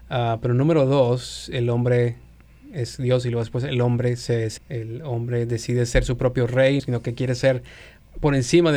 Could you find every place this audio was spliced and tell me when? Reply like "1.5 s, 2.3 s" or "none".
4.6 s, 6.8 s